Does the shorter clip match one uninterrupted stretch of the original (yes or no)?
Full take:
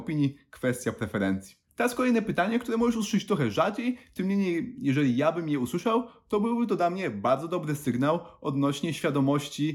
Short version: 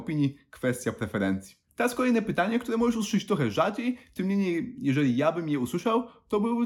yes